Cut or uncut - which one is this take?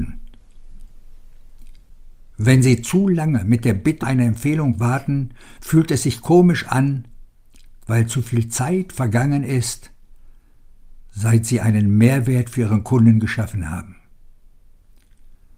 cut